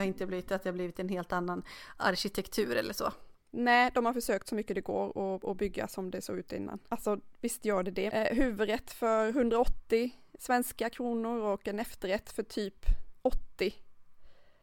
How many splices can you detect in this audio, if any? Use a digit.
2